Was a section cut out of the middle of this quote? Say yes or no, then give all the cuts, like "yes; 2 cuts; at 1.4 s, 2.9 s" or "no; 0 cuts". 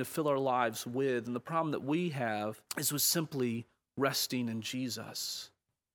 yes; 1 cut; at 2.7 s